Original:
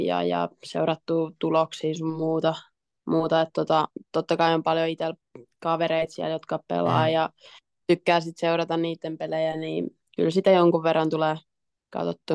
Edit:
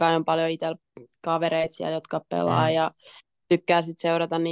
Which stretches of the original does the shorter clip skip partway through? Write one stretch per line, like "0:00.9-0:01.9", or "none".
none